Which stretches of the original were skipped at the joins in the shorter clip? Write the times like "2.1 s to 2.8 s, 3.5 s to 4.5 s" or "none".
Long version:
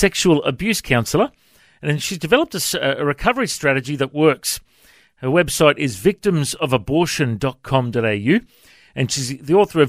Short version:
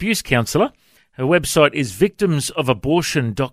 1.5 s to 5.0 s